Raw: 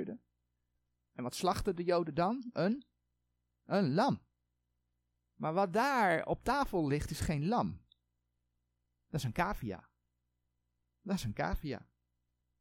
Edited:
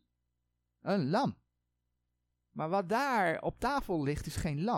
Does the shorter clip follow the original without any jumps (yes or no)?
yes